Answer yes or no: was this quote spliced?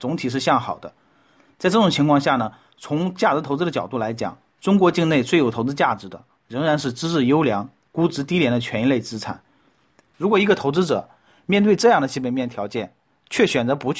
no